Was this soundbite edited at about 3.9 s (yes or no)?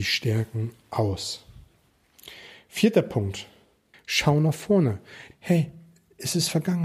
yes